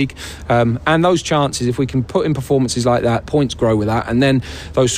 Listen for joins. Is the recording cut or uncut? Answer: cut